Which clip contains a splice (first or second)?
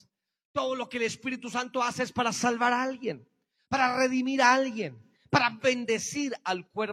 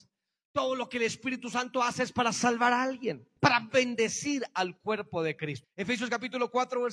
second